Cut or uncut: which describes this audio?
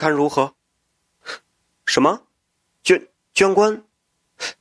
uncut